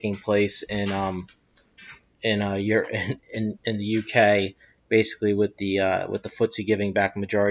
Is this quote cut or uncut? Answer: uncut